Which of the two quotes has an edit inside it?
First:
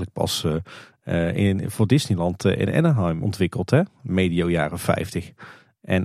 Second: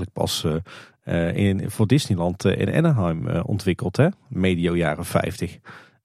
first; 1 cut; at 3.2 s

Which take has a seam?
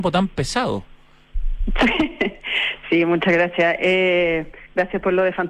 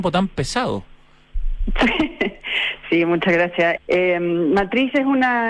second; 1 cut; at 3.8 s

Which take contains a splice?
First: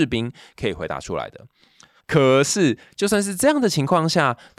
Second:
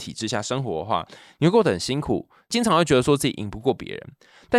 first; 1 cut; at 2.0 s

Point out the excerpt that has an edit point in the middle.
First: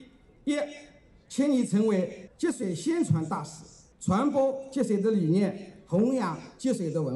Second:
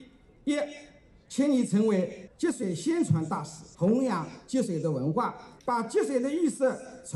second; 2 cuts; at 3.7 s, 5.6 s

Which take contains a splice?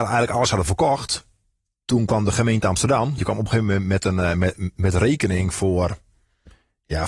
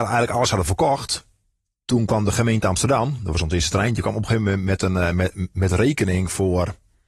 first; 1 cut; at 3.2 s

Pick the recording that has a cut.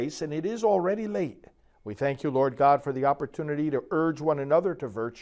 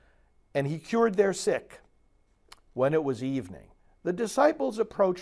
first; 1 cut; at 1.7 s

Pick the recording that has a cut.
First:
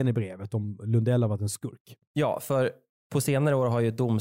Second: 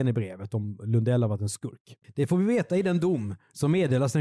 second; 1 cut; at 2.0 s

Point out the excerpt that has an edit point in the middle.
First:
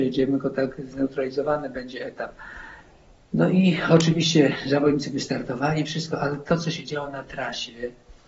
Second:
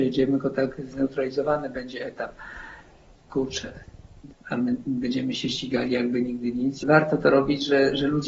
second; 3 cuts; at 3.2 s, 4.3 s, 6.8 s

